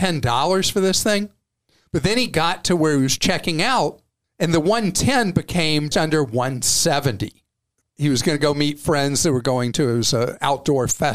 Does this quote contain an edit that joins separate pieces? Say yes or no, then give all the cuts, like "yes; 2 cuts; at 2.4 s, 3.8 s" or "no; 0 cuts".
yes; 2 cuts; at 5.9 s, 7.8 s